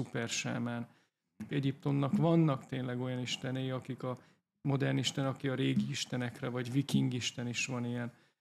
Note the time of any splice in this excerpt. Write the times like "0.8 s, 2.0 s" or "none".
1.5 s